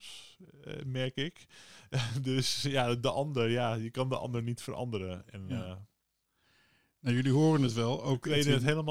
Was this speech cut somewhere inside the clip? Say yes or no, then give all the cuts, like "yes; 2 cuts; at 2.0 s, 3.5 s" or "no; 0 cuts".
no; 0 cuts